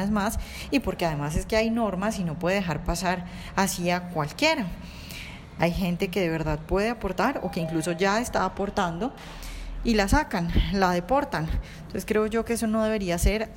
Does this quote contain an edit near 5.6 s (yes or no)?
yes